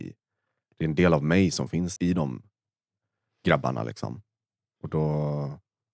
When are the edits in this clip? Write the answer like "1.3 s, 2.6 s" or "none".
2.0 s